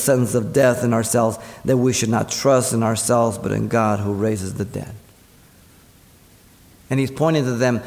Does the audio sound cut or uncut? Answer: uncut